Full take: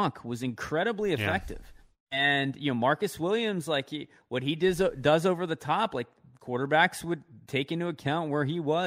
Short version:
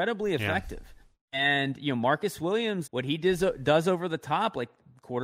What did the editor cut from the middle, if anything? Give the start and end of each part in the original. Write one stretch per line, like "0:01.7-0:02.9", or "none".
0:03.6-0:04.2